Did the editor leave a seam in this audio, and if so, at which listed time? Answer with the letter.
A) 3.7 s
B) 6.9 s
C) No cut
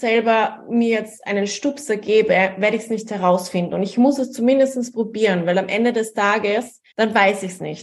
B